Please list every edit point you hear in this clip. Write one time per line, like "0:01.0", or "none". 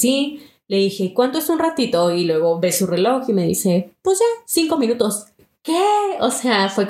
none